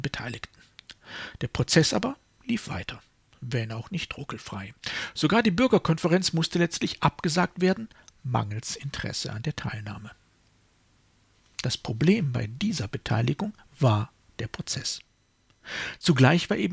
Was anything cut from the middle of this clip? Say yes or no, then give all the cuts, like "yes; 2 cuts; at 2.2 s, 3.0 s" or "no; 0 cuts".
no; 0 cuts